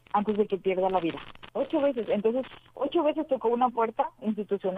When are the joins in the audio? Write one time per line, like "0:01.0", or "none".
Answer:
0:01.5